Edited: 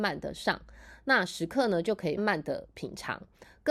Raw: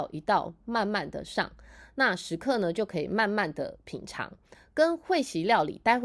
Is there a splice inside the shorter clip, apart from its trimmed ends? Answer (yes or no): yes